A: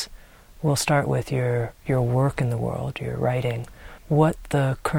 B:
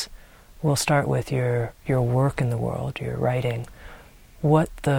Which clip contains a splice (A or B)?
A